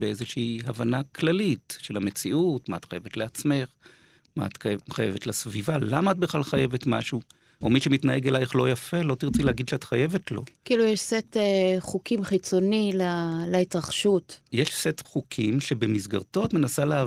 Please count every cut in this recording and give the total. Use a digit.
1